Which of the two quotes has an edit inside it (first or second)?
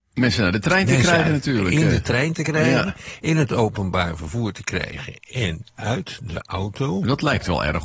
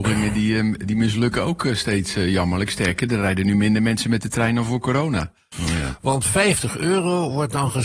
second